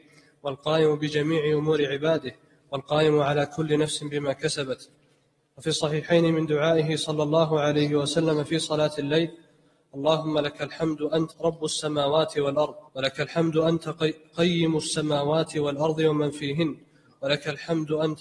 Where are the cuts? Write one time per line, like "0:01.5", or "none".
0:11.3
0:12.9